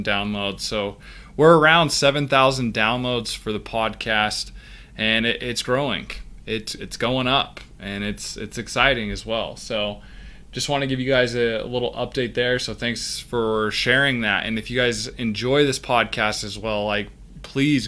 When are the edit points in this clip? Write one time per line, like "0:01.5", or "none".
none